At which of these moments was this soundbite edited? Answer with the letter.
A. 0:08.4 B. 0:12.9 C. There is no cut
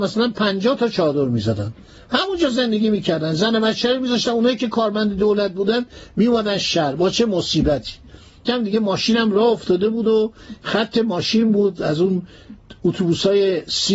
A